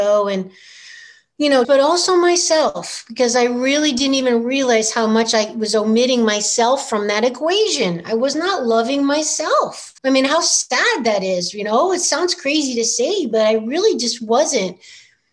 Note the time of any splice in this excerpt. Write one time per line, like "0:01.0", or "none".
0:01.6
0:10.0